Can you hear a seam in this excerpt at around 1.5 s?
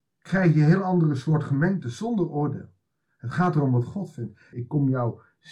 no; 2 cuts; at 3.1 s, 4.5 s

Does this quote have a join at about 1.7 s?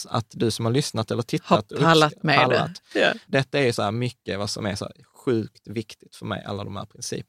no; 1 cut; at 3.3 s

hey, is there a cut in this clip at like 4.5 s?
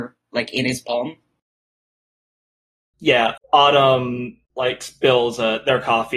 yes; 2 cuts; at 3.4 s, 4.5 s

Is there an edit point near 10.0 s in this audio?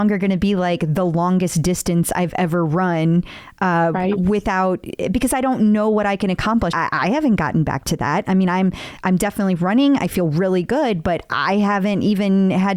no; 1 cut; at 6.7 s

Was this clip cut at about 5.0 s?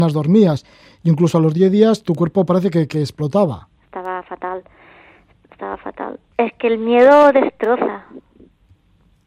no; 2 cuts; at 3.8 s, 6.3 s

